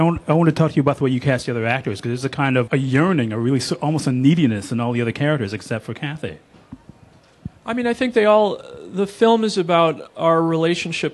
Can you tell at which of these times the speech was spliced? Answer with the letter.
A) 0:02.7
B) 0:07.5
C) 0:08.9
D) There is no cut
A